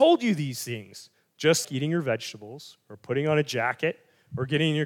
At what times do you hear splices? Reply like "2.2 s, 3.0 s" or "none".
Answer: 1.6 s